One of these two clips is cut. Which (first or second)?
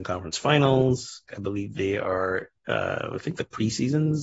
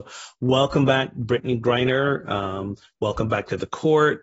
first